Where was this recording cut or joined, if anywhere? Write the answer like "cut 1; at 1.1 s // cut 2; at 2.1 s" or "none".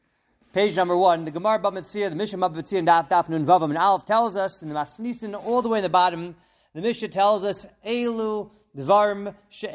none